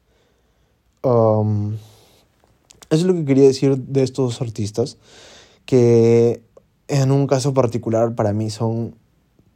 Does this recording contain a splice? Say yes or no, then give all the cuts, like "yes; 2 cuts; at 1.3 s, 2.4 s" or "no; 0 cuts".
no; 0 cuts